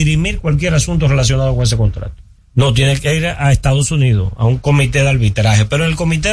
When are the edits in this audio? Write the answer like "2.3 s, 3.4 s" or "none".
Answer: 2.4 s